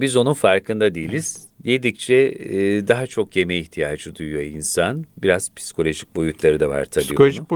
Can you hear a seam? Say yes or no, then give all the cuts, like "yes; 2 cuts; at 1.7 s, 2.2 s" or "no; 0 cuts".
yes; 1 cut; at 1.5 s